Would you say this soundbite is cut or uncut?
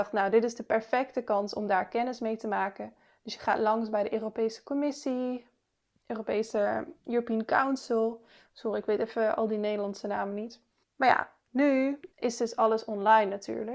cut